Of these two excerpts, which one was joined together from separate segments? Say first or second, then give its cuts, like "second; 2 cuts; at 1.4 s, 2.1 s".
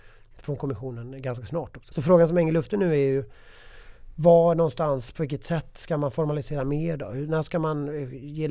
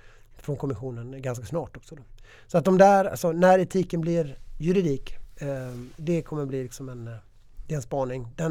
first; 1 cut; at 1.9 s